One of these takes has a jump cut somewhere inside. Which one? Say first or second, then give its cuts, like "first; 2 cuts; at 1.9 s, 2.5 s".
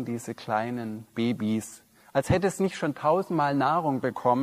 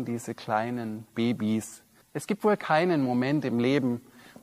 second; 1 cut; at 2.0 s